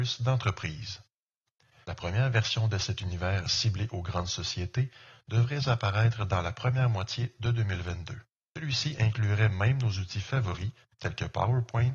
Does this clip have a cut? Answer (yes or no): yes